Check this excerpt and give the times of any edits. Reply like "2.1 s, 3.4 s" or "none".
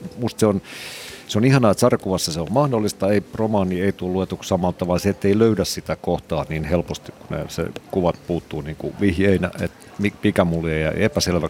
none